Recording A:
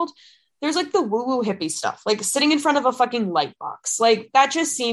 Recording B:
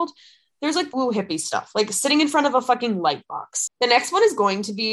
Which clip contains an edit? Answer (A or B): B